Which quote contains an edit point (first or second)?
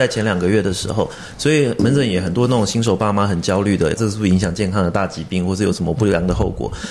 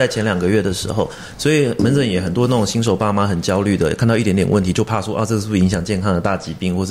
first